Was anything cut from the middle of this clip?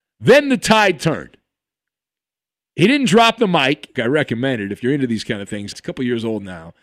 yes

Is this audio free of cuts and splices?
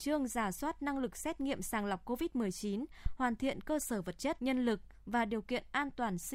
no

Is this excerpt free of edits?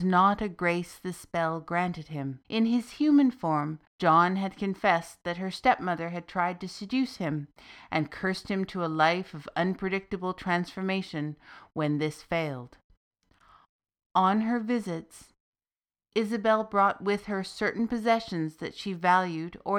no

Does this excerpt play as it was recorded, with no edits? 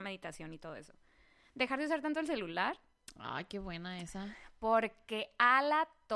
yes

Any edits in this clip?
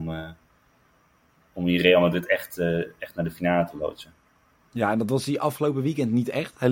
no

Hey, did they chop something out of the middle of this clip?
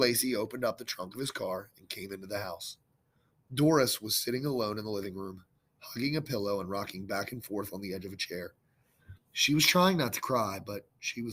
no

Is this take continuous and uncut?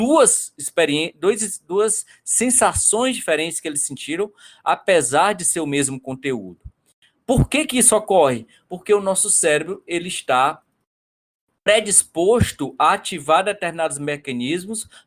yes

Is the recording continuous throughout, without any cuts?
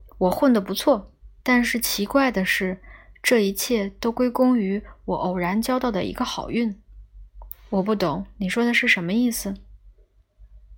no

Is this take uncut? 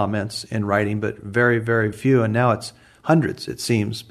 no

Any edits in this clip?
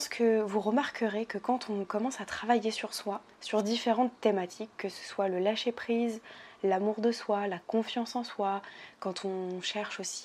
no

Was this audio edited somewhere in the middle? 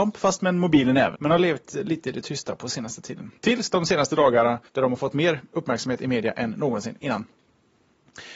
yes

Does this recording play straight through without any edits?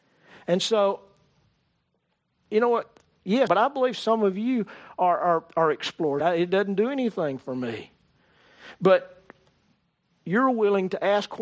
no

